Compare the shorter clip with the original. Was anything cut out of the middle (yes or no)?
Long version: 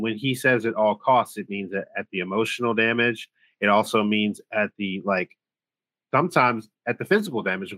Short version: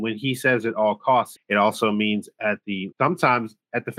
yes